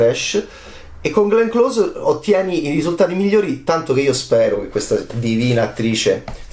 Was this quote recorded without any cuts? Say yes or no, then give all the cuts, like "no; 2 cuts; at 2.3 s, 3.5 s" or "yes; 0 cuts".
yes; 0 cuts